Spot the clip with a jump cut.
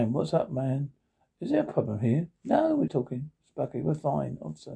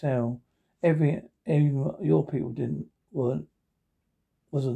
first; 1 cut; at 2.9 s

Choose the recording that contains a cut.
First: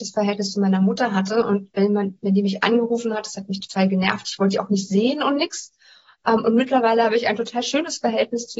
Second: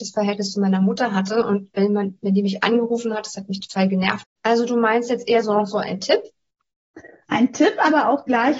second; 1 cut; at 4.2 s

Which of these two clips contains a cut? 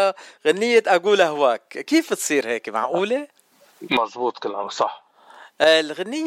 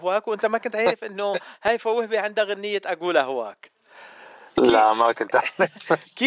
first; 1 cut; at 3.9 s

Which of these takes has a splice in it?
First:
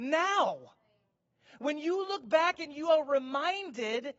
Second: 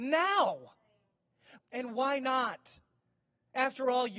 second; 1 cut; at 1.6 s

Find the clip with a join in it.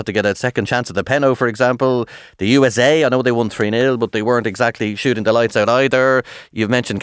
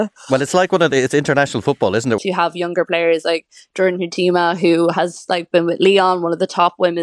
second; 1 cut; at 2.2 s

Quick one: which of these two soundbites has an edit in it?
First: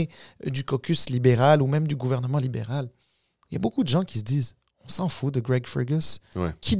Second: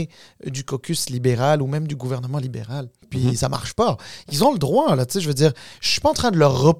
second; 1 cut; at 3.0 s

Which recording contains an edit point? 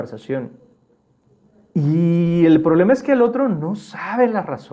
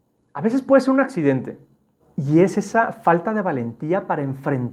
second; 1 cut; at 2.0 s

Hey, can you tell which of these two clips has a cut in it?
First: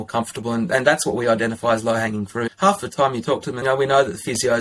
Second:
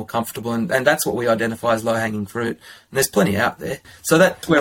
first; 2 cuts; at 2.5 s, 3.6 s

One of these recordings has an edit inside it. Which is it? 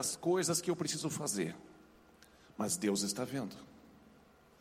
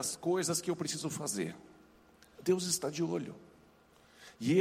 second; 1 cut; at 2.4 s

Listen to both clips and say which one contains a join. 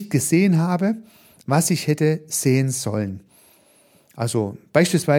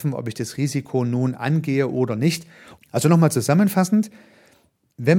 second; 1 cut; at 2.8 s

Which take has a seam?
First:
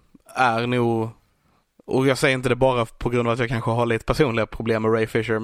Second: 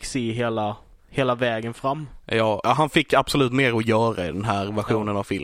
second; 1 cut; at 2.6 s

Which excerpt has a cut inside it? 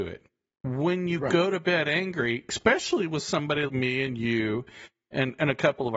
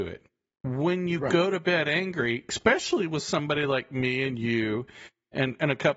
first; 1 cut; at 3.7 s

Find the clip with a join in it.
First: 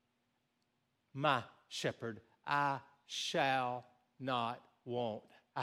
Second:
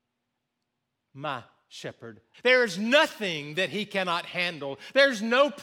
second; 1 cut; at 2.3 s

